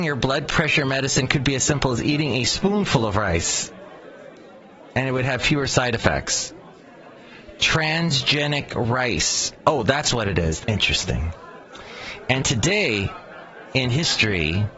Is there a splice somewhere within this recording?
yes; 1 cut; at 10.6 s

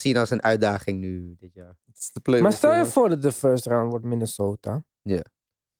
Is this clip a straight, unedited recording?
yes; 0 cuts

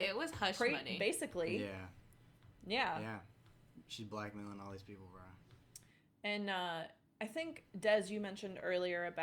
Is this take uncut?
no; 1 cut; at 7.7 s

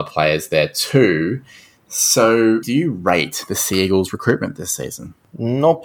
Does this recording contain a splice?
yes; 1 cut; at 2.6 s

